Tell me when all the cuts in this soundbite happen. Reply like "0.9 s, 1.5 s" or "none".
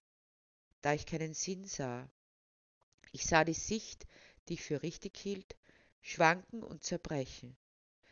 none

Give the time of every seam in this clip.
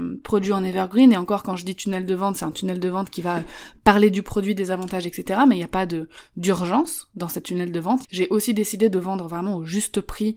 8.0 s

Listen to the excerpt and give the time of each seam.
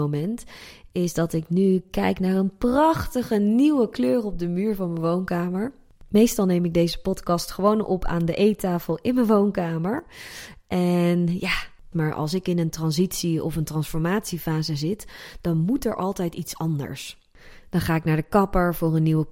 11.9 s

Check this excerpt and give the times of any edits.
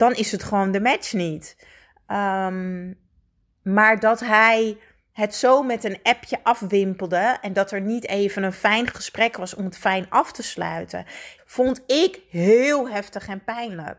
11.4 s

